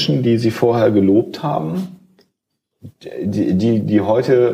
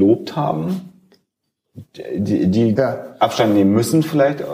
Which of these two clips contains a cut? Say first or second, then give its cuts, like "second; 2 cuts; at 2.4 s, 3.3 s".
second; 1 cut; at 2.8 s